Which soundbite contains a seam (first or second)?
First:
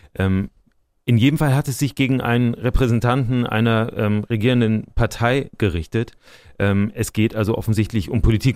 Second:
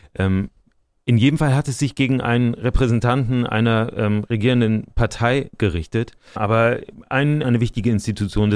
second